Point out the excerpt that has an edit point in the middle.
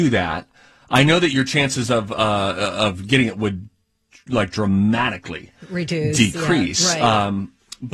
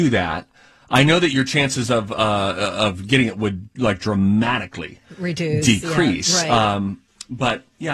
second; 1 cut; at 3.7 s

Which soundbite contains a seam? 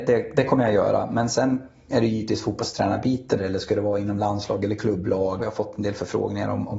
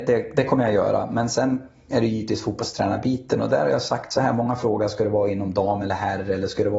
first; 2 cuts; at 3.4 s, 5.4 s

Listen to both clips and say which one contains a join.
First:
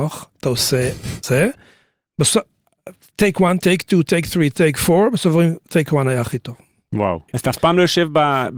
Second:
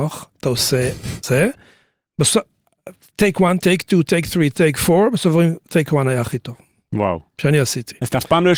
first; 1 cut; at 7.3 s

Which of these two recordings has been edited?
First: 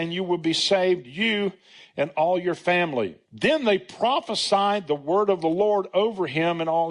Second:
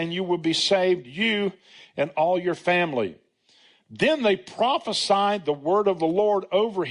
first; 1 cut; at 3.2 s

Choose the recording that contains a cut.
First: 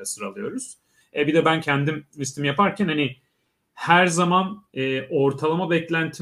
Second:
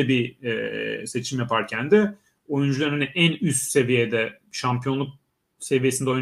first; 1 cut; at 1.0 s

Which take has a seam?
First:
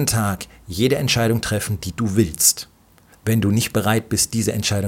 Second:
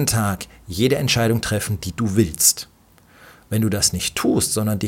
first; 1 cut; at 3.1 s

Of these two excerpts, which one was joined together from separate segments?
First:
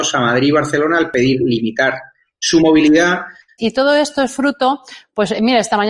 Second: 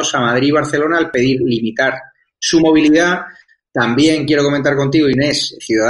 first; 1 cut; at 3.6 s

